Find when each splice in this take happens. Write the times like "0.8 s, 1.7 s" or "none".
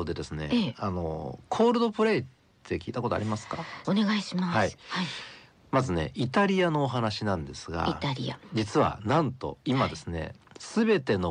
3.8 s